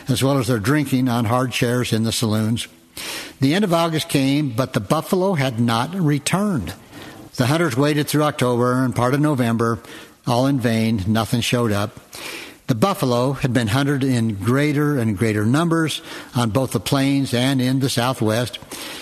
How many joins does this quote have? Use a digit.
1